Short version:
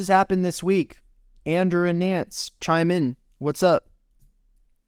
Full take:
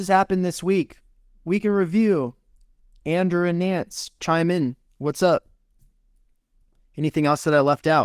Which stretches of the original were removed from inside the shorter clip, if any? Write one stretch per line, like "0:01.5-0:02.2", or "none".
0:01.3-0:02.9